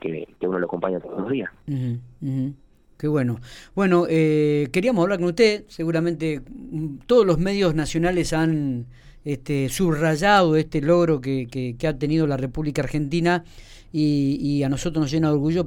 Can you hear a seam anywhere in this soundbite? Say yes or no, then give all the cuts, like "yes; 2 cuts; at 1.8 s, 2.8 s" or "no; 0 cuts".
no; 0 cuts